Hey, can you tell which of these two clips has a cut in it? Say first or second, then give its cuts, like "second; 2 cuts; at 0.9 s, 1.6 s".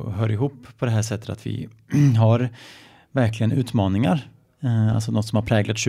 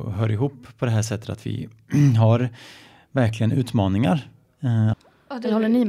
second; 1 cut; at 4.9 s